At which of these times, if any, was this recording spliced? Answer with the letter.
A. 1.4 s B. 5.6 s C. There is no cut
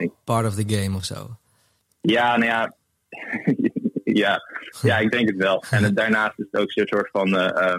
C